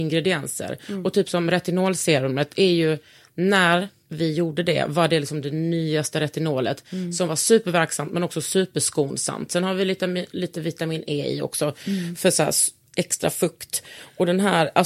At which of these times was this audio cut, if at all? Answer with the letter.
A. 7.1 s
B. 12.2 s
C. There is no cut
C